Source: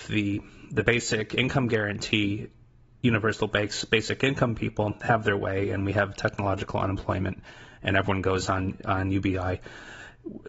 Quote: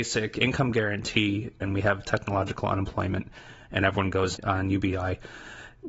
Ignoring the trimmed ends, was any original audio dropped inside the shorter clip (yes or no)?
yes